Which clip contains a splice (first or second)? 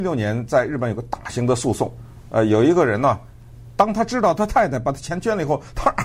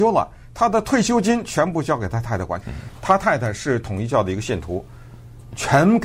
second